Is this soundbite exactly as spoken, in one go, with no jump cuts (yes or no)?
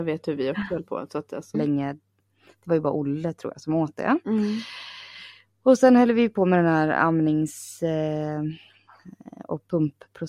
no